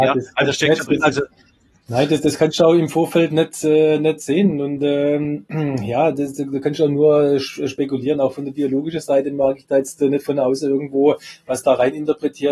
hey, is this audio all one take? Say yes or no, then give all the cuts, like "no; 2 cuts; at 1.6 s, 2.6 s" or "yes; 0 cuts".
yes; 0 cuts